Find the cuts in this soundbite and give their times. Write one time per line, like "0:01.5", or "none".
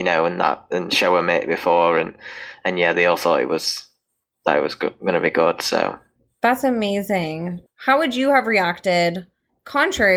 0:07.7